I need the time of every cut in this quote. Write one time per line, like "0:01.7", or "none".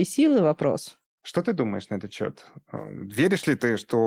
0:01.2